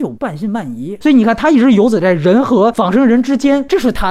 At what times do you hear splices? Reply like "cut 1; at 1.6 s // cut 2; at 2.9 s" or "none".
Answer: none